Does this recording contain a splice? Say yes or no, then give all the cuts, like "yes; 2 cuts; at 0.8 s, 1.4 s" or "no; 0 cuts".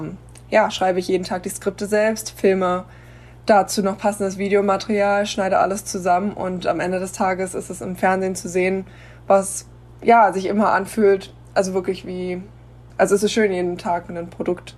no; 0 cuts